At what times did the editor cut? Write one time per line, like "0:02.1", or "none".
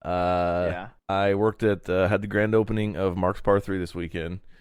0:01.0